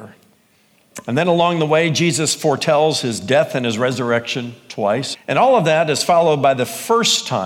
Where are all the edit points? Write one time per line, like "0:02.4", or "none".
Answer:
0:05.1